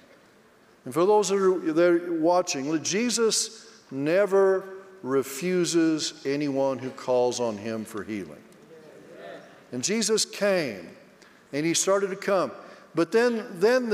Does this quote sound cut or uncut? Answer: uncut